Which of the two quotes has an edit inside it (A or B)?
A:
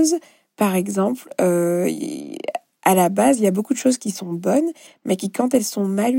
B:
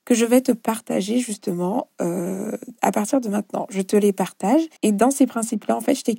B